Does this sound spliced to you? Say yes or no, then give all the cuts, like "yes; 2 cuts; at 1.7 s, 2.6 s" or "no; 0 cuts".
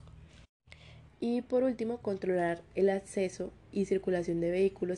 yes; 1 cut; at 1.1 s